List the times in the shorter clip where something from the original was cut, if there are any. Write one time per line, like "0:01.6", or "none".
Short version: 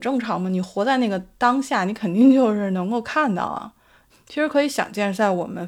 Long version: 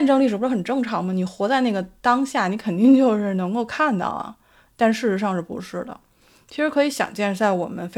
0:04.1